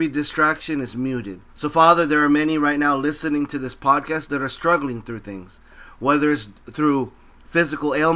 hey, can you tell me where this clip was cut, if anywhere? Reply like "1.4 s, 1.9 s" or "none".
1.5 s